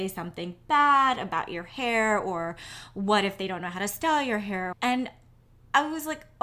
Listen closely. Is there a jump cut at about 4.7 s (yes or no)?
yes